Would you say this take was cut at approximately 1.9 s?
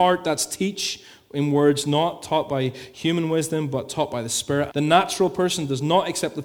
no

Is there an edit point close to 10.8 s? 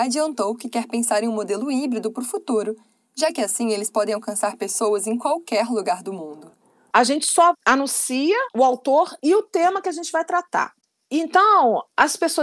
no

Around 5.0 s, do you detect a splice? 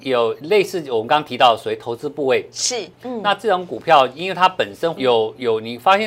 yes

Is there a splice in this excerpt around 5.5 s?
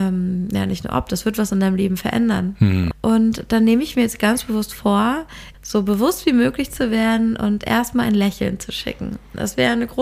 yes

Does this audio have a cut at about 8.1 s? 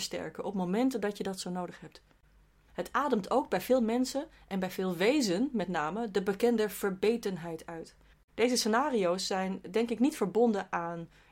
yes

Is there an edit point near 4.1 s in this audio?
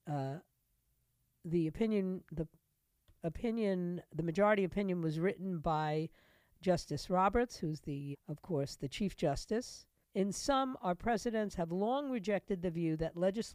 no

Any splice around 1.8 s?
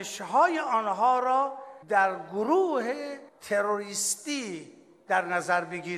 yes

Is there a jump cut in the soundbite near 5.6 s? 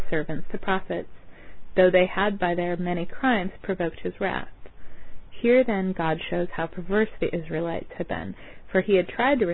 no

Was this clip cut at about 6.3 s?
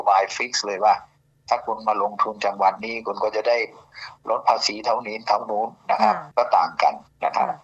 yes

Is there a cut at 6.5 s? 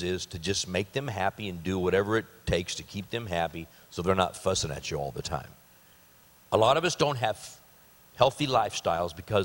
yes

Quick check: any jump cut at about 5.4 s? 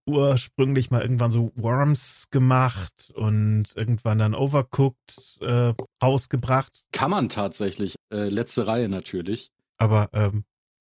no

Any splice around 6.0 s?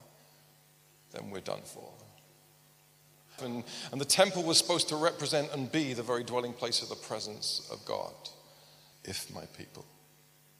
no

